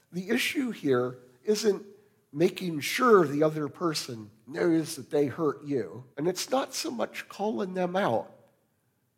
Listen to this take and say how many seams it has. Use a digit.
1